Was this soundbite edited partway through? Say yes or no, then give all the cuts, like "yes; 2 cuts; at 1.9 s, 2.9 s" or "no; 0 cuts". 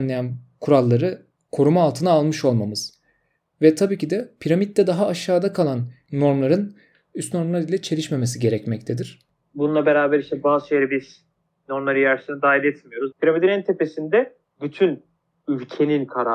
yes; 1 cut; at 13.1 s